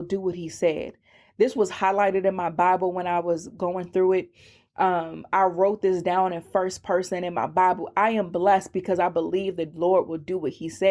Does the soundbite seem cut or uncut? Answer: uncut